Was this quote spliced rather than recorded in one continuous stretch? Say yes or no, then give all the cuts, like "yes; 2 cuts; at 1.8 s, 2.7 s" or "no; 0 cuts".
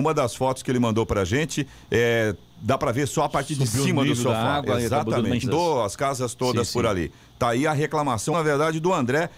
yes; 2 cuts; at 5.4 s, 8.3 s